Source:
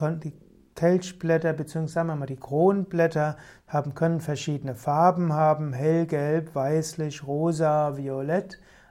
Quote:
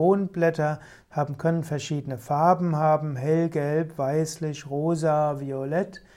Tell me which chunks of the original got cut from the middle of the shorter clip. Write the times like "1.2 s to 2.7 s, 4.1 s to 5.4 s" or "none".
none